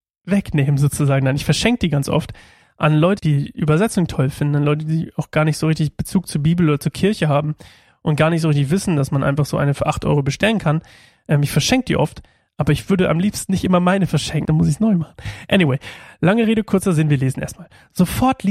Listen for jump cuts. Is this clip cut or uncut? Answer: cut